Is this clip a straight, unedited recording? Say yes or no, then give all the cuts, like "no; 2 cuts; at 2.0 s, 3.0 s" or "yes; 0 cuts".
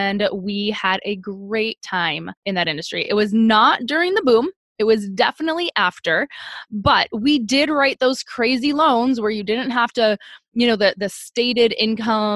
yes; 0 cuts